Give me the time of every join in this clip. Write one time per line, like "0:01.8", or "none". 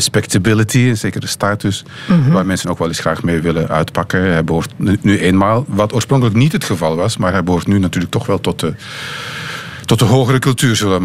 none